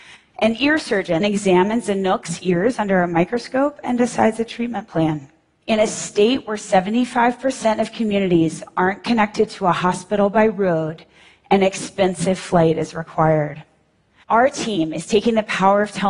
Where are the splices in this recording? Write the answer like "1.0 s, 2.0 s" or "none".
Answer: 1.2 s, 5.6 s, 14.2 s